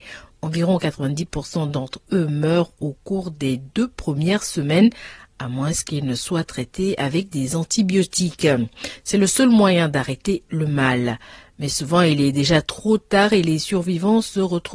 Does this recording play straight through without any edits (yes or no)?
yes